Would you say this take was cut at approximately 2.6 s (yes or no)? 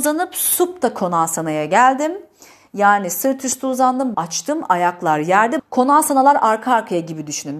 no